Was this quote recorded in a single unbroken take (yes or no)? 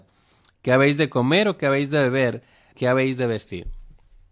no